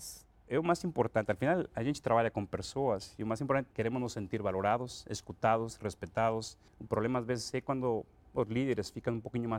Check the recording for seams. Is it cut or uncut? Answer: cut